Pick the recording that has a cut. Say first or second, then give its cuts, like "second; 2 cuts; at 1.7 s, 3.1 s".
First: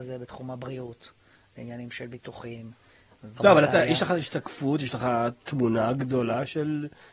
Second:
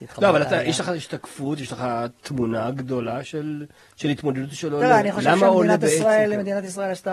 first; 1 cut; at 3.4 s